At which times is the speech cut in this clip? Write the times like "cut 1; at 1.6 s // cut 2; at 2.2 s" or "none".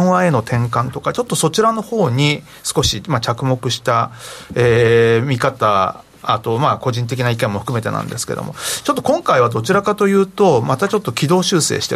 none